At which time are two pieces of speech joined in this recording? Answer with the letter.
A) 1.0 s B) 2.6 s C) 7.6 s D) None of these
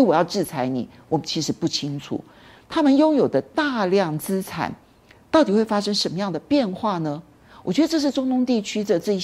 B